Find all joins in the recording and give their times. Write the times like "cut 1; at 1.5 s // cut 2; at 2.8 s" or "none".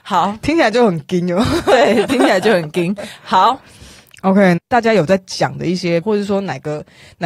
cut 1; at 4.6 s // cut 2; at 6.0 s